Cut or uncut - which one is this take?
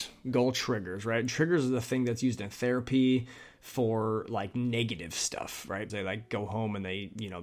cut